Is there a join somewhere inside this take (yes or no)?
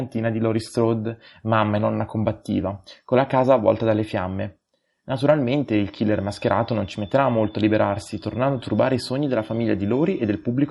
no